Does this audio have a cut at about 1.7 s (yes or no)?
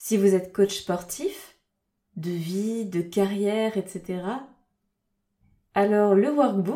no